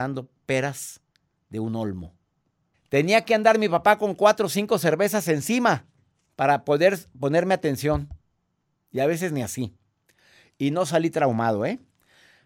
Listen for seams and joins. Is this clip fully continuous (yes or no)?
no